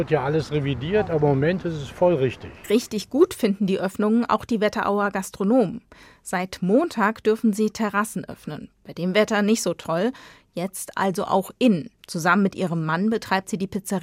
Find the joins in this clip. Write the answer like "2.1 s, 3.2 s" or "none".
12.0 s